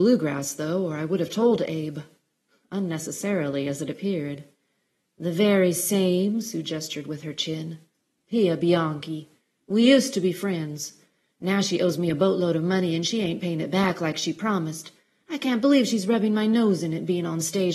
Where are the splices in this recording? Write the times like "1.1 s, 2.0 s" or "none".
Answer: none